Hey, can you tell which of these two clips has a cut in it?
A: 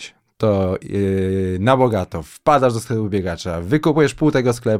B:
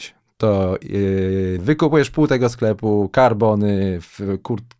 B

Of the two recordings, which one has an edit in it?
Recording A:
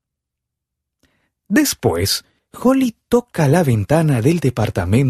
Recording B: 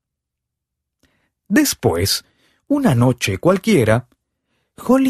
A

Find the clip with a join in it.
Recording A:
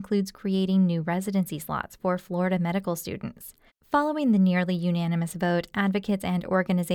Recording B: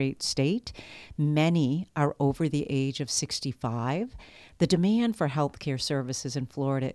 A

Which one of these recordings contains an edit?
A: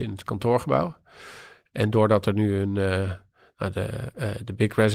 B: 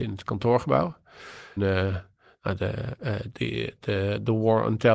B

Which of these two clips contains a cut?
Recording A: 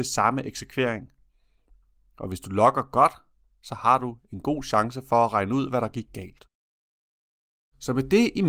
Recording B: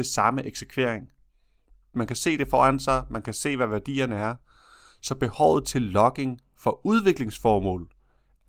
B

